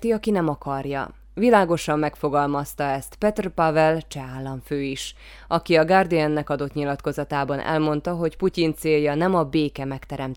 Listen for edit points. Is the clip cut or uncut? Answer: uncut